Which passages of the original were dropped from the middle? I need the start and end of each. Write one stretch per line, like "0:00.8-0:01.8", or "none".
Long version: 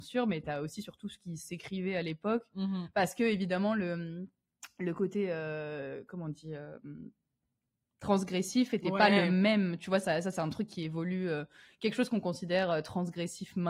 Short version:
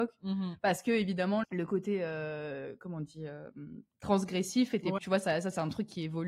0:03.8-0:04.7
0:07.2-0:07.9
0:09.0-0:09.8

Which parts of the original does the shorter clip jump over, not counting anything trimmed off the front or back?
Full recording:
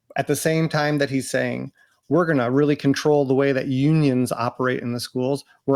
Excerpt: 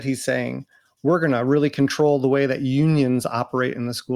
none

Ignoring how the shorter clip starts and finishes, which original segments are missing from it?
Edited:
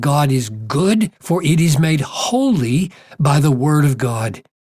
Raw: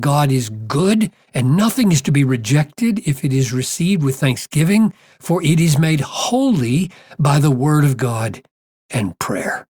0:01.2-0:05.1

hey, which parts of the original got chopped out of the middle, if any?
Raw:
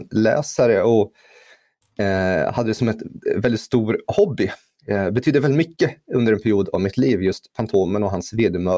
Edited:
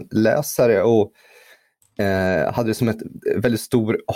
none

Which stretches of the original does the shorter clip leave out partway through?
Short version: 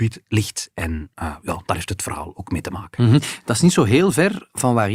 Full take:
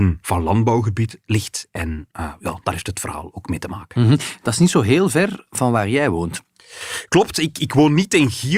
none

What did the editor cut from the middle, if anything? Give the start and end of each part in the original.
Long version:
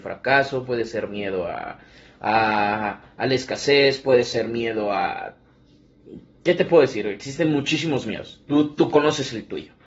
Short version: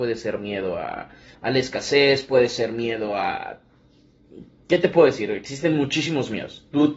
0:02.0-0:03.1

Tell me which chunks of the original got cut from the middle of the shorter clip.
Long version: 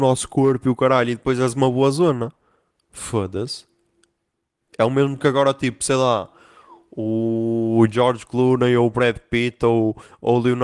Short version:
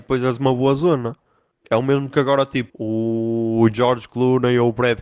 0:02.7-0:04.6
0:05.8-0:06.9

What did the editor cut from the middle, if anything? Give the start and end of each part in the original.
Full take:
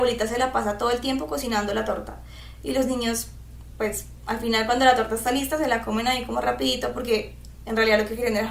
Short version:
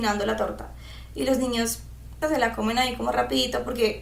0:03.7-0:05.5

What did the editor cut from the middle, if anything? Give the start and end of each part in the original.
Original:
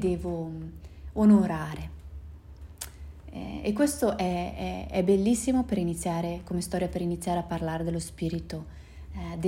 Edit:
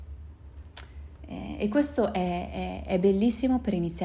none

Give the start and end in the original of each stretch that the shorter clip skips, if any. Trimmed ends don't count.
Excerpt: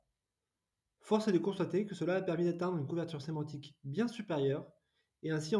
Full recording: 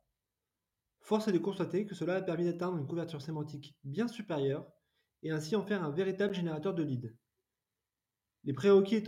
none

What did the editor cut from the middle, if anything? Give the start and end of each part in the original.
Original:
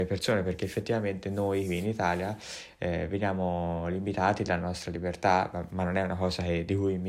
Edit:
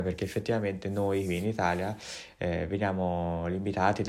none

